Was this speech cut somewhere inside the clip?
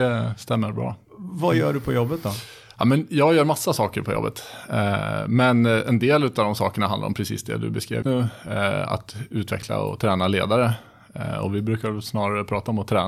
yes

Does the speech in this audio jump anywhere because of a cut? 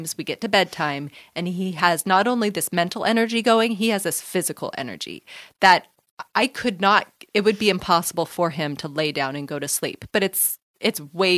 yes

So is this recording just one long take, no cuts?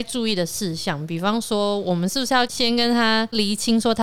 yes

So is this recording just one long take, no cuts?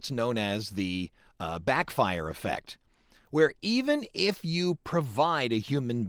yes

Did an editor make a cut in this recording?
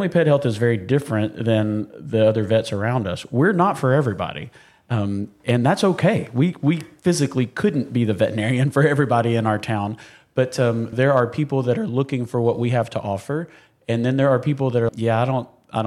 yes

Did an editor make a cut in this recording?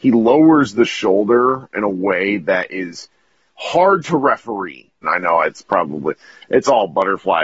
yes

